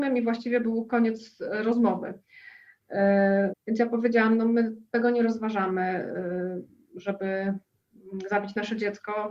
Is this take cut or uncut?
cut